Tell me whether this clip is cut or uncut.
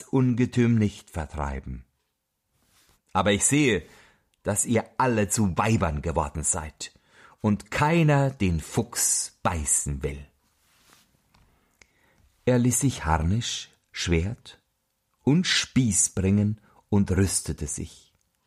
cut